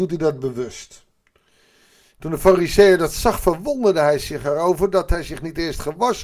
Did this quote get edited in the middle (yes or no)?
no